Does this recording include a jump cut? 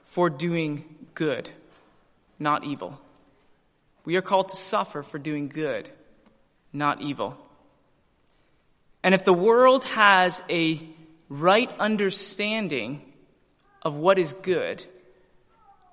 no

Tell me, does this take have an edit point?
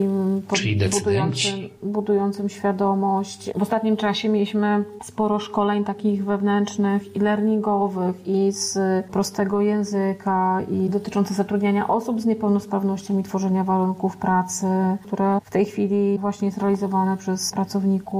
yes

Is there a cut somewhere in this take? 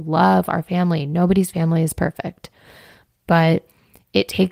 no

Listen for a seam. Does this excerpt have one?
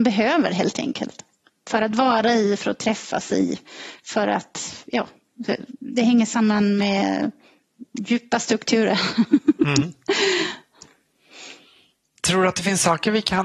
no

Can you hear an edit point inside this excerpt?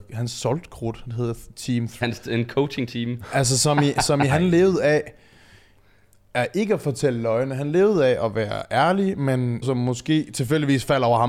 yes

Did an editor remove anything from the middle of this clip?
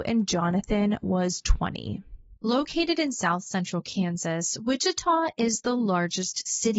yes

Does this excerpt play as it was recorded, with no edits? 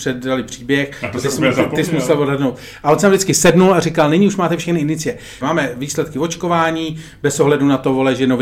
no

